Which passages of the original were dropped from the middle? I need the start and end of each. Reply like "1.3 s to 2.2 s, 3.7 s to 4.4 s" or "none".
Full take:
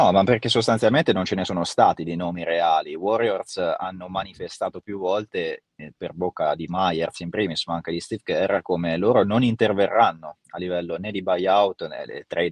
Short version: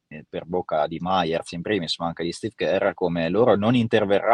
none